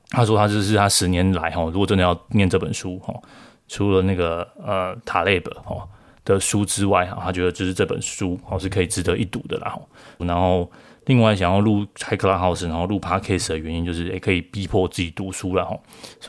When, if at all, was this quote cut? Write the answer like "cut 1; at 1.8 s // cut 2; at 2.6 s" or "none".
cut 1; at 10.2 s

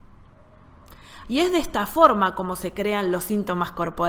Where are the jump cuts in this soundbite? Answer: cut 1; at 1.2 s

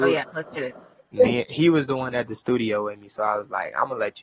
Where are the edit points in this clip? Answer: cut 1; at 1.1 s

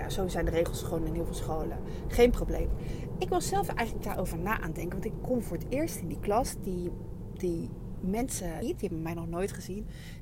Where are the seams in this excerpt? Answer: cut 1; at 8.6 s

